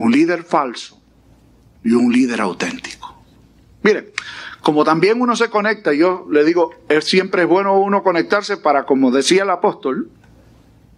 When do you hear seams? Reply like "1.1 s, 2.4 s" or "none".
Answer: none